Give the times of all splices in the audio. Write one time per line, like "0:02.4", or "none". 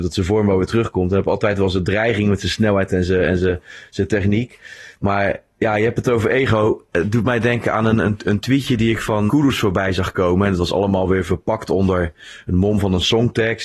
0:09.3

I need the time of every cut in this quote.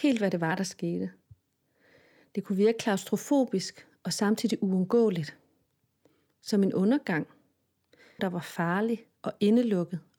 0:08.2

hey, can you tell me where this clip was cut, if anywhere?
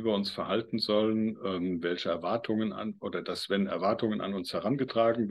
none

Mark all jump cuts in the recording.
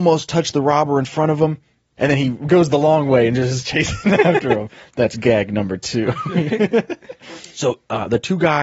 0:02.0

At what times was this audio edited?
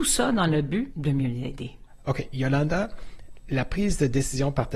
none

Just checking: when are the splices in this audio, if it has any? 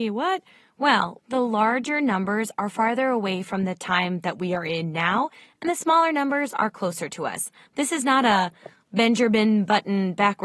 0:01.2

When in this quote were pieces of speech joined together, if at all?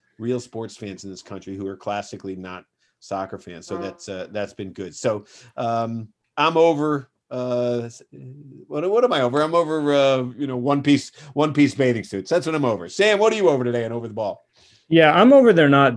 none

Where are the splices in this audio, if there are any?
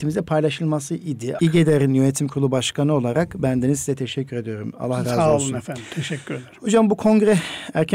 0:01.4

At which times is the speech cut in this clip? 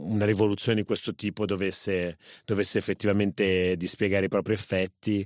none

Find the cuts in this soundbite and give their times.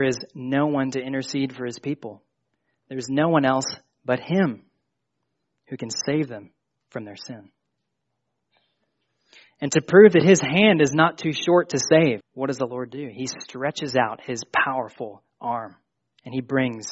0:12.2

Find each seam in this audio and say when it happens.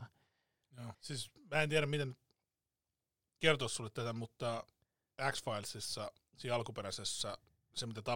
0:00.9

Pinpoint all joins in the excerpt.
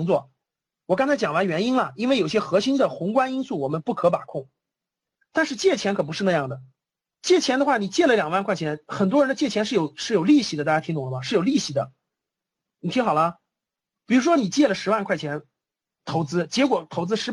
0:05.2

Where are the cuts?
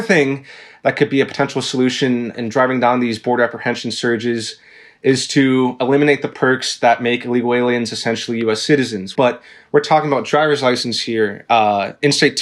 0:02.3
0:09.2

